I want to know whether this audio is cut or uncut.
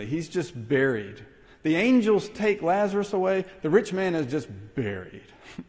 uncut